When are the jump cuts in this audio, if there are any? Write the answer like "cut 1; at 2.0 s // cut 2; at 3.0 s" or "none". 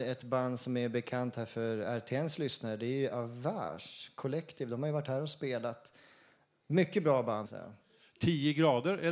cut 1; at 7.4 s